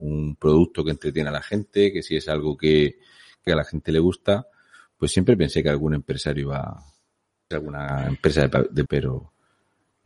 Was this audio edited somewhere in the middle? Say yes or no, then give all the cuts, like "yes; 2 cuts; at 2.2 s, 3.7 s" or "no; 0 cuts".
yes; 3 cuts; at 3.5 s, 7.5 s, 8.9 s